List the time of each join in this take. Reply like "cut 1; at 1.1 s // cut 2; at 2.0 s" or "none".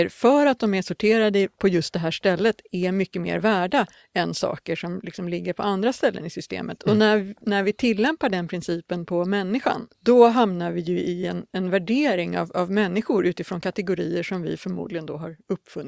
cut 1; at 6.8 s // cut 2; at 9.9 s